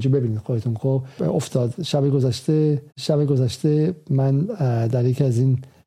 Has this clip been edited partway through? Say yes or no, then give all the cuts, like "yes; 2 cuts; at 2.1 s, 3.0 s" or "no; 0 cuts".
yes; 2 cuts; at 1.2 s, 2.9 s